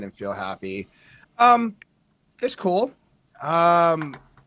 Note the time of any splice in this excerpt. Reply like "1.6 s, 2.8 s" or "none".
1.2 s